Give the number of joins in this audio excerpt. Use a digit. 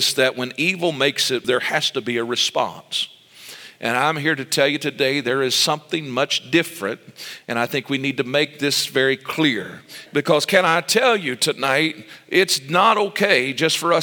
2